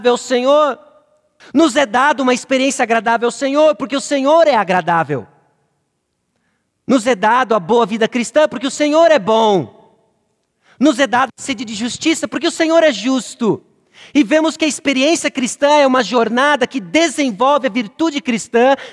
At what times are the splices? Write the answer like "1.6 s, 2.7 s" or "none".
1.4 s